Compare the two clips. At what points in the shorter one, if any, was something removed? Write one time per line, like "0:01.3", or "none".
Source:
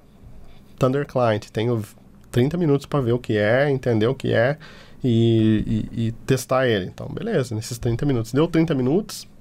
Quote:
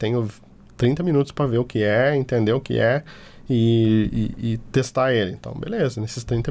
none